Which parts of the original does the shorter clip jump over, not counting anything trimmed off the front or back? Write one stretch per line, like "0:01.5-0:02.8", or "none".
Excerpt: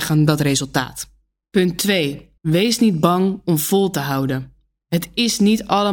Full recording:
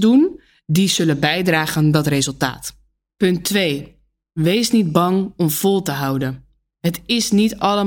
0:04.0-0:04.3